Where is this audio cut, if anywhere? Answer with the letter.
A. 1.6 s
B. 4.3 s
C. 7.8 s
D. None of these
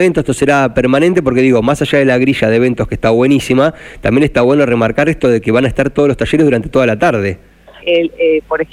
C